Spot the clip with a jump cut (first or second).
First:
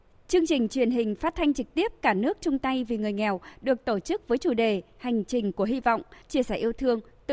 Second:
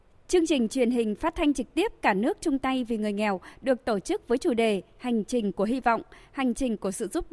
first